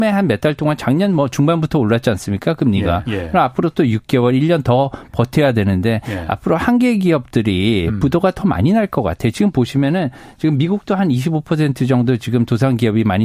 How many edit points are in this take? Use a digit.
1